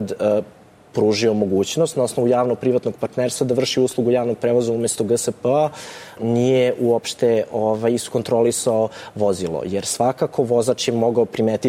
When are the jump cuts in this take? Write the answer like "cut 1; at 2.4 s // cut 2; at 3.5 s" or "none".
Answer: cut 1; at 6.2 s